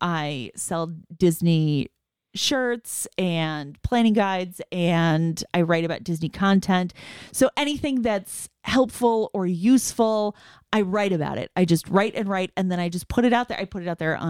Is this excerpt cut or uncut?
uncut